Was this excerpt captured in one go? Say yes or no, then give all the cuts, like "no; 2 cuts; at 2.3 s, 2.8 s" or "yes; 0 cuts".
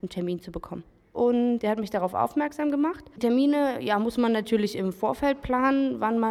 no; 1 cut; at 1.1 s